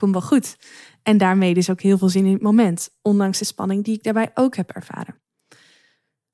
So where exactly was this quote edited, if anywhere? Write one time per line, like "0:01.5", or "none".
none